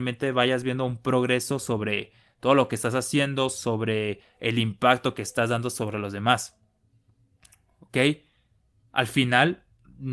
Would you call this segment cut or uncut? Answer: uncut